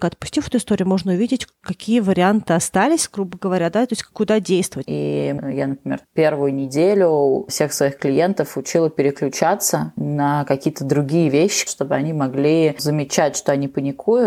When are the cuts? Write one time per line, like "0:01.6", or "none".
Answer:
0:04.8
0:11.7